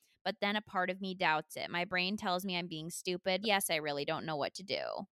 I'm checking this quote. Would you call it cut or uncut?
cut